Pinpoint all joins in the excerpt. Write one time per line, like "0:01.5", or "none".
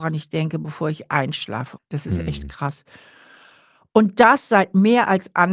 0:01.8